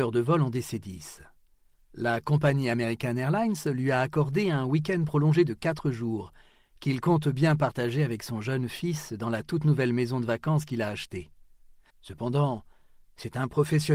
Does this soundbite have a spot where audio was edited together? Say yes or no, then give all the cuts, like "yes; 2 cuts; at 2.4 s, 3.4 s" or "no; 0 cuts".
yes; 2 cuts; at 1.8 s, 11.9 s